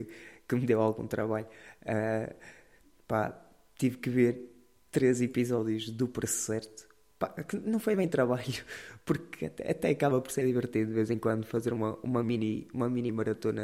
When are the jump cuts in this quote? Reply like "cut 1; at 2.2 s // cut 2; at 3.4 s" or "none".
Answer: none